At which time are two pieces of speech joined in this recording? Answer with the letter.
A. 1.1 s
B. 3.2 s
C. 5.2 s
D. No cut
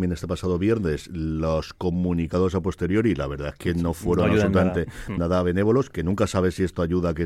C